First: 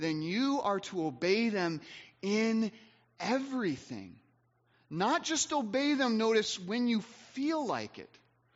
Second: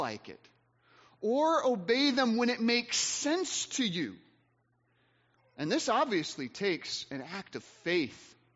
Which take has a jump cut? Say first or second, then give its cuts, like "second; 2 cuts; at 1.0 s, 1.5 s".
second; 1 cut; at 5.4 s